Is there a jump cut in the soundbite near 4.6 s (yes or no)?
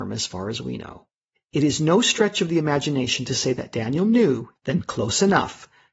yes